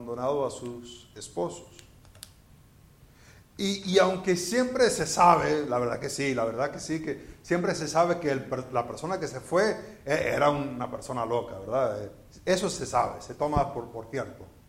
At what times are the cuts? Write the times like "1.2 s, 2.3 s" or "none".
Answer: none